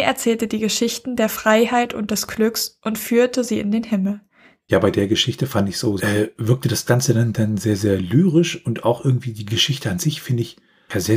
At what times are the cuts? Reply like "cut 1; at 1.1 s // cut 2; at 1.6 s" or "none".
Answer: cut 1; at 6.0 s

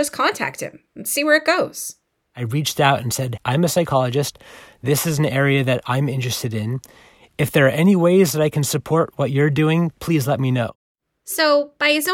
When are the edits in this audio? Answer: cut 1; at 3.4 s

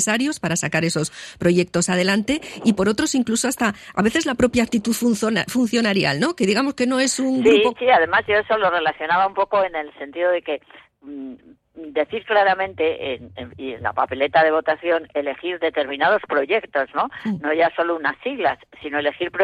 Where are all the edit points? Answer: cut 1; at 7.7 s

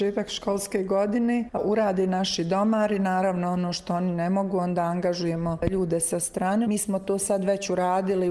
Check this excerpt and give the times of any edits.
cut 1; at 6.6 s

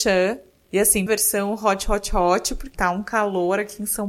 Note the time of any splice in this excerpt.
cut 1; at 1.1 s // cut 2; at 2.7 s

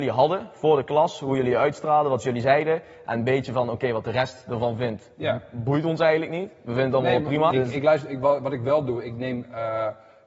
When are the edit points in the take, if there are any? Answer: cut 1; at 7.5 s

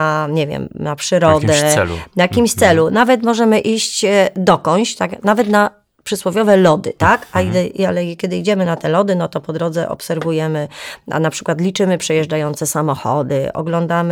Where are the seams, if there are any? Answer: none

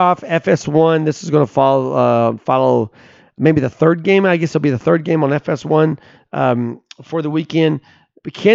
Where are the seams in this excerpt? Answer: none

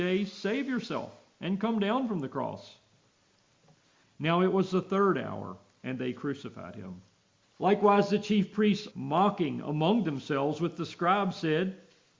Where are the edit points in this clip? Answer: cut 1; at 4.0 s // cut 2; at 7.4 s // cut 3; at 8.9 s

